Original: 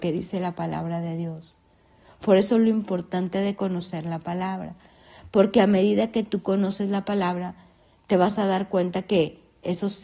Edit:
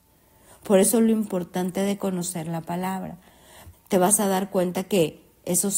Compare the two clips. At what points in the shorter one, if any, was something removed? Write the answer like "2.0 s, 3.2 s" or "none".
3.7 s